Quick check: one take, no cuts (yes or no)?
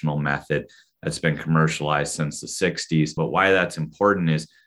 no